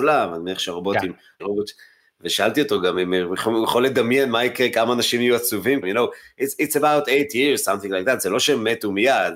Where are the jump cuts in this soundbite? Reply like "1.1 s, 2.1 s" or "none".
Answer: 1.4 s, 5.8 s